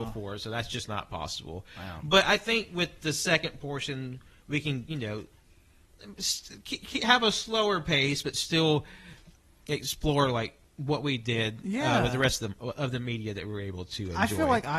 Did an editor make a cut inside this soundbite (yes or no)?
no